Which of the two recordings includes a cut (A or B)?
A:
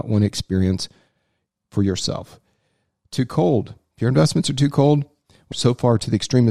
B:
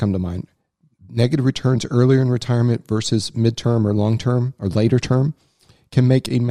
A